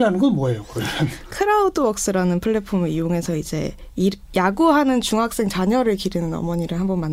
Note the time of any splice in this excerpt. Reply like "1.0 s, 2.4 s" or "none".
1.3 s